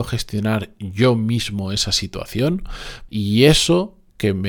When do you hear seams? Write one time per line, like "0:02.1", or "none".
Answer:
0:03.1